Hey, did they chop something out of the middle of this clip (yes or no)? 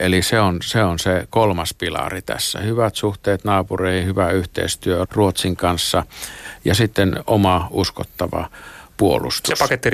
yes